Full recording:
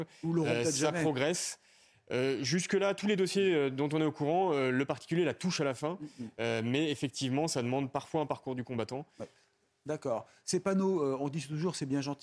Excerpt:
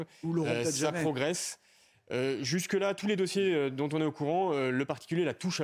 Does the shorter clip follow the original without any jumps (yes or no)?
yes